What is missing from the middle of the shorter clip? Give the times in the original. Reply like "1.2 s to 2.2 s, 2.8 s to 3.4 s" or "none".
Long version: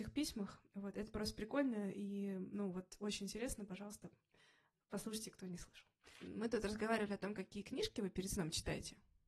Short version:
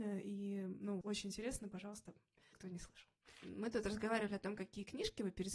2.7 s to 3.0 s, 4.5 s to 5.3 s